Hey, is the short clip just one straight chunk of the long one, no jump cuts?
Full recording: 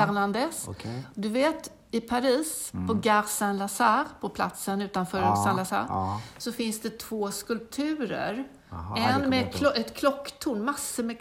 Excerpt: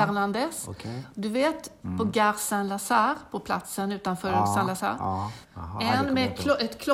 no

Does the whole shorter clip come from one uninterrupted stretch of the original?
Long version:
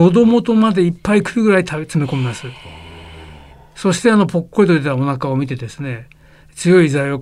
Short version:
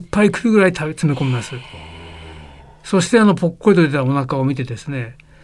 yes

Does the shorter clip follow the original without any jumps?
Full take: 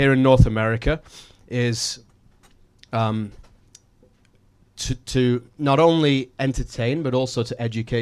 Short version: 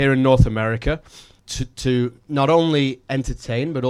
no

